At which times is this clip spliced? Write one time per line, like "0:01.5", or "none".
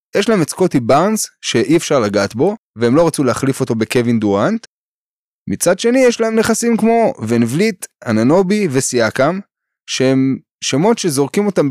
none